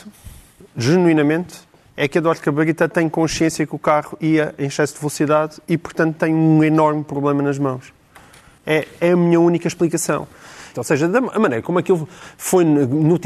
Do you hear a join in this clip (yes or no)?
yes